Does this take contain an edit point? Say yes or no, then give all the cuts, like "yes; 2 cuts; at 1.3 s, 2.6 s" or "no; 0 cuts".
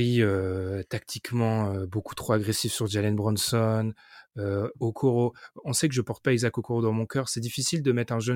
no; 0 cuts